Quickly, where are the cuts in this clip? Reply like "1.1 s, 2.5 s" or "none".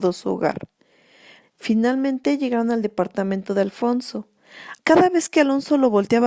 1.4 s, 4.8 s